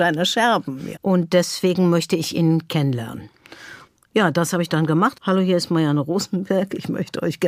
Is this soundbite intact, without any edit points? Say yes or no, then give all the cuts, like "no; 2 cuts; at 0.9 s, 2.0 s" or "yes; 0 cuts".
no; 2 cuts; at 0.9 s, 5.1 s